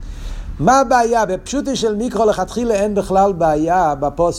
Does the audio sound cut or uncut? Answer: uncut